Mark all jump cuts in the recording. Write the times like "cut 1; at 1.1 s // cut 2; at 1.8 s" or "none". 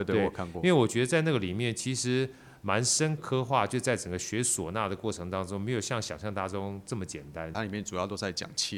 cut 1; at 3.2 s // cut 2; at 7.5 s